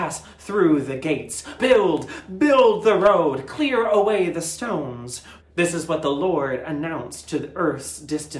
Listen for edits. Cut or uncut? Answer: cut